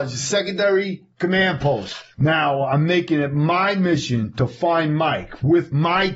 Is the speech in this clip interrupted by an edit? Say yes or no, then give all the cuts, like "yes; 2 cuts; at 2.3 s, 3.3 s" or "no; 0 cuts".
yes; 1 cut; at 2.1 s